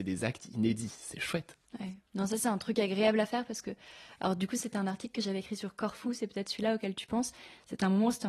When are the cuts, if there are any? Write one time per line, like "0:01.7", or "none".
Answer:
none